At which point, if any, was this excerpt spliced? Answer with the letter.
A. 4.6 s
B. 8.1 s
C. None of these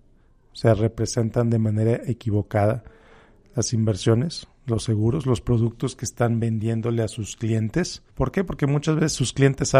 B